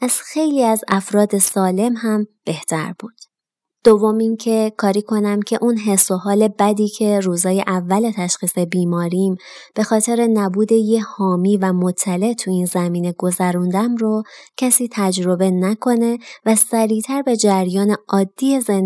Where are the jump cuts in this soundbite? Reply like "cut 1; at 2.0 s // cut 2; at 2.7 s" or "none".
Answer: cut 1; at 3.7 s